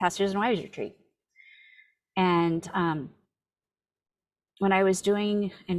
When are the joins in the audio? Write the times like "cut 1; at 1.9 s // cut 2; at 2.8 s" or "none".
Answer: none